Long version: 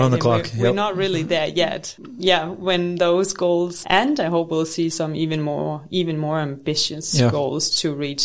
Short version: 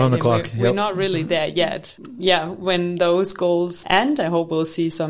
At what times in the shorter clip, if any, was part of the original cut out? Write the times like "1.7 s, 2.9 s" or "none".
none